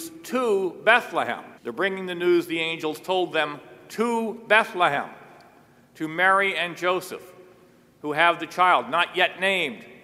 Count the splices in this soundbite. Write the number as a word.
one